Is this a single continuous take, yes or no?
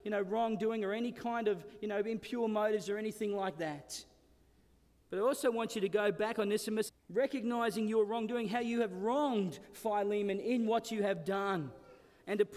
no